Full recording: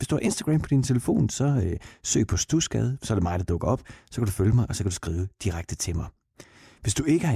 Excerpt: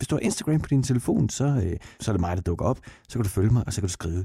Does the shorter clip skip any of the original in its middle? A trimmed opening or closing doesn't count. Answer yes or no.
yes